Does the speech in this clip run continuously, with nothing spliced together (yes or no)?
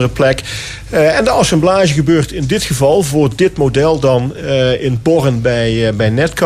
yes